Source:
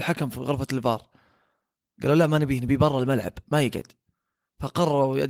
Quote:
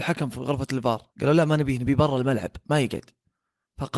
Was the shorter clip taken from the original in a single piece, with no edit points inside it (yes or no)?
no